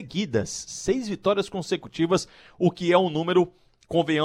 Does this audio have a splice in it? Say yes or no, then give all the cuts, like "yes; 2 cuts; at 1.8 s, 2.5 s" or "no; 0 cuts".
no; 0 cuts